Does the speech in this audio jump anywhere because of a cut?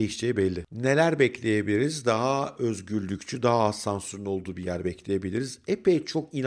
no; 0 cuts

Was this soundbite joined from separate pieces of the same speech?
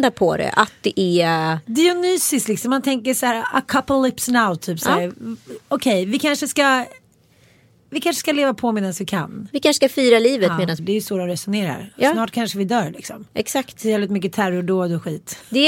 yes; 1 cut; at 10.8 s

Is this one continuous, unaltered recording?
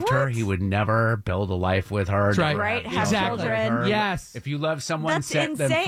yes; 0 cuts

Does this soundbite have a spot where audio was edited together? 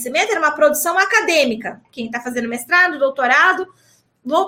yes; 1 cut; at 1.8 s

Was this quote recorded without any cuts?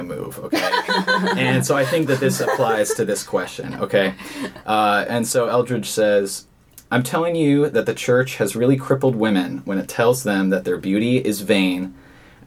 yes; 0 cuts

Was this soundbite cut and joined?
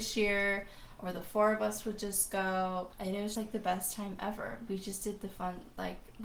yes; 2 cuts; at 3.3 s, 4.7 s

